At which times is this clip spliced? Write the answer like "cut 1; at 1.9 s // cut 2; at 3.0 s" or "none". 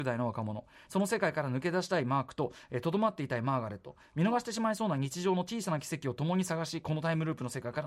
none